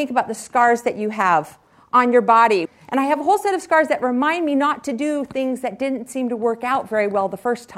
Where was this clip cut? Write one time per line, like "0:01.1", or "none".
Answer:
0:02.7